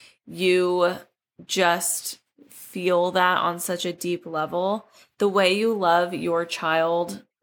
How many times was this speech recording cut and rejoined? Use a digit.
0